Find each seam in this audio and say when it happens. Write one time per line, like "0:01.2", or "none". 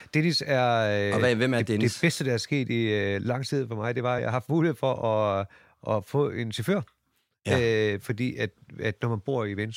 none